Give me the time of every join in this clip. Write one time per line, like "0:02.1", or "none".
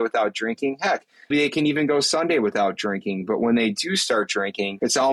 0:01.3